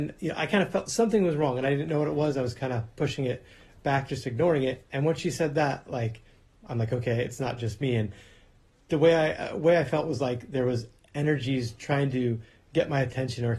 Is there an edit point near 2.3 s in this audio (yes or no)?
no